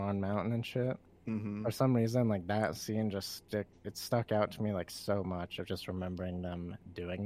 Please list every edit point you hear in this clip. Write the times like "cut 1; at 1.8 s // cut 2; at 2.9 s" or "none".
none